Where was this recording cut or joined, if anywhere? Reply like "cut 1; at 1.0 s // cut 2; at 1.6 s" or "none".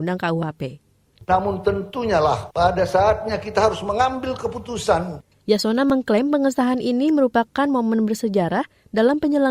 cut 1; at 1.2 s